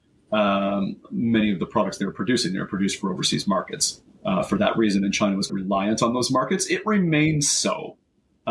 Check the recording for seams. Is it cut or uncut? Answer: cut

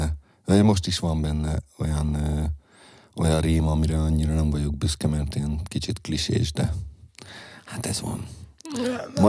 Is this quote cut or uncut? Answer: uncut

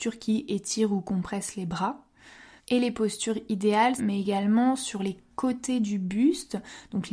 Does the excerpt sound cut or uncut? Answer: cut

